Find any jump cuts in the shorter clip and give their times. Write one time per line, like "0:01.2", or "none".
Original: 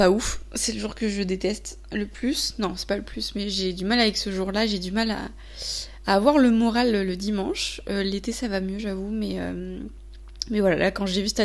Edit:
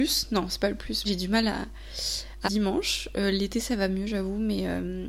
0:01.0
0:02.4